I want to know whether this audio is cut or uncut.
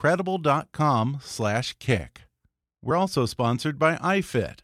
uncut